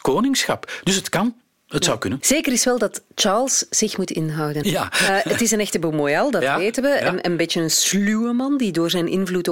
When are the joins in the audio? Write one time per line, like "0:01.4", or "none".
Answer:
0:02.2
0:04.6